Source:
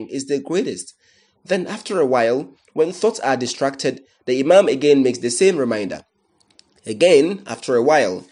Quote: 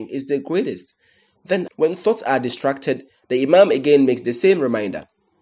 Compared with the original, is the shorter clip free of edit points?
no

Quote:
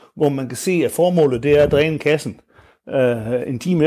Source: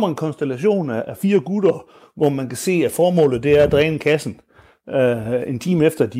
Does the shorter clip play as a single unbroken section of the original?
yes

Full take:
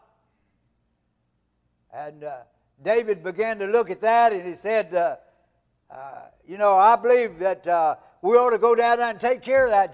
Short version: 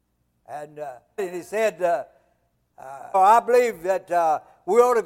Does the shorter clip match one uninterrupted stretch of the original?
no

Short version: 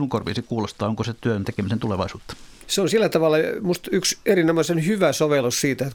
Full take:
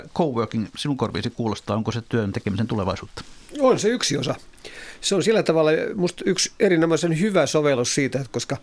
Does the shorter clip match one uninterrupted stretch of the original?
no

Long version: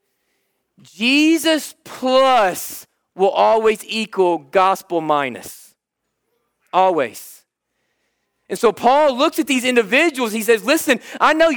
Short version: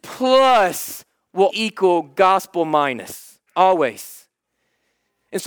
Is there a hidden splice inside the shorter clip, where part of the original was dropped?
yes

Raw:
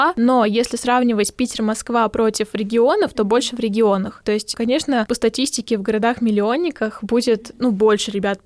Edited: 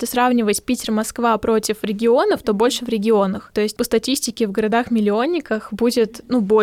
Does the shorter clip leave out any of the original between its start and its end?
yes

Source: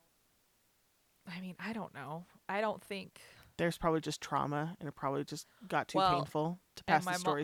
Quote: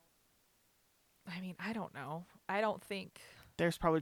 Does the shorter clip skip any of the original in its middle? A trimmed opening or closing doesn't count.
no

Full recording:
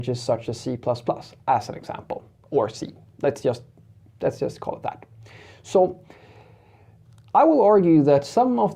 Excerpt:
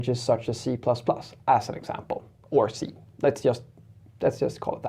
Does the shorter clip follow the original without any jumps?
yes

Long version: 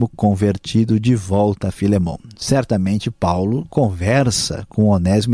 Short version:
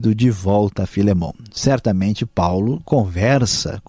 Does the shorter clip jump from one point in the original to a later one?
no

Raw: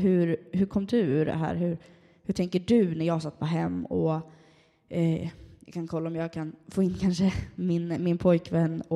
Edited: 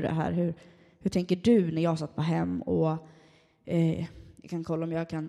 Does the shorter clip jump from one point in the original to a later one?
no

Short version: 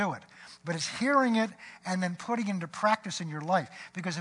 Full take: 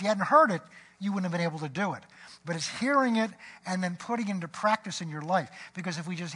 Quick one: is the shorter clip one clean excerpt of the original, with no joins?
yes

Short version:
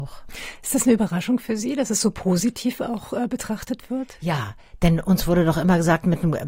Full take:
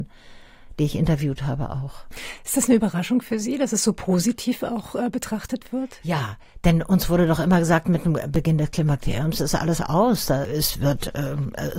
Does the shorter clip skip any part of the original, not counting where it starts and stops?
no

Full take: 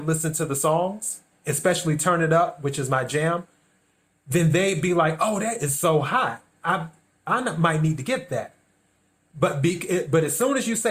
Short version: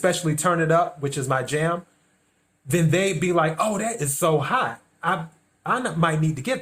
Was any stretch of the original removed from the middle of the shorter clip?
no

